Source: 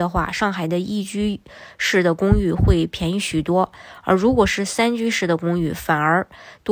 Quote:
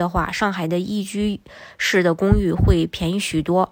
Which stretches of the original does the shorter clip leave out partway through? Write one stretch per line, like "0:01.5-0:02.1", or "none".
none